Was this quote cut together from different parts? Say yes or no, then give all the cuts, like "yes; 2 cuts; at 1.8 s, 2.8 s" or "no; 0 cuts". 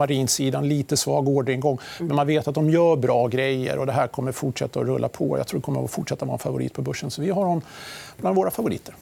no; 0 cuts